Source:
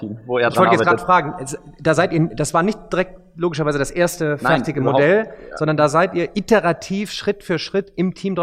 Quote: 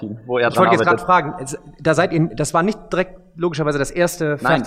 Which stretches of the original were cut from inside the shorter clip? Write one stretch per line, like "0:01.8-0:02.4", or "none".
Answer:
none